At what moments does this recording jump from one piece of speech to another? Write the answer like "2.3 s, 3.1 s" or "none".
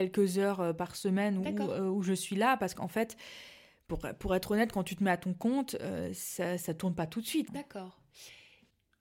7.5 s